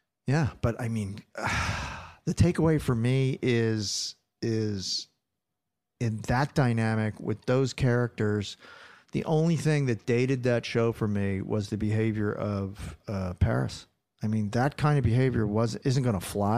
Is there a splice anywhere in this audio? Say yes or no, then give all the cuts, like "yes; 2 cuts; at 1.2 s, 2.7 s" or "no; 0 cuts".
no; 0 cuts